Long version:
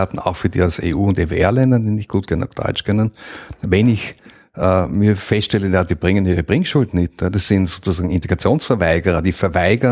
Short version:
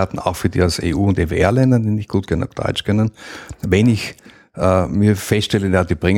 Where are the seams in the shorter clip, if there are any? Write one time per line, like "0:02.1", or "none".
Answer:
none